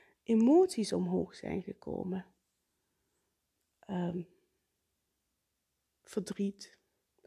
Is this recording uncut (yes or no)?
yes